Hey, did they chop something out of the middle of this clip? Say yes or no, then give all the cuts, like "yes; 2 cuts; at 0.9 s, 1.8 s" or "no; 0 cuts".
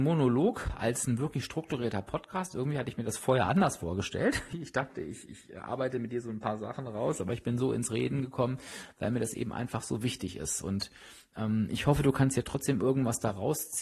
no; 0 cuts